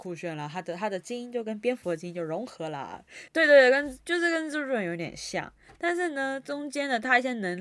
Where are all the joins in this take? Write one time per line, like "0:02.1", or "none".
0:03.3